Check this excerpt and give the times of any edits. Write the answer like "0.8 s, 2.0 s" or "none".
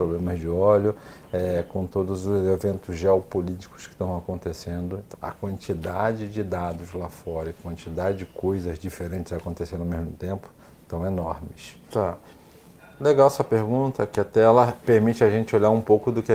5.1 s, 11.9 s